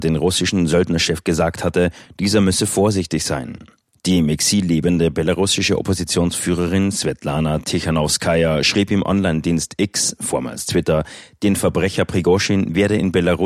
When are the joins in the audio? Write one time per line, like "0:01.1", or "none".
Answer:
none